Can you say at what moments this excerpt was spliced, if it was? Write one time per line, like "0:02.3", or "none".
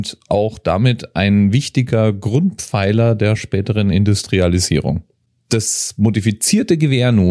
none